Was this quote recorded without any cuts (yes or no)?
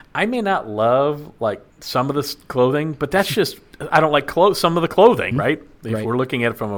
no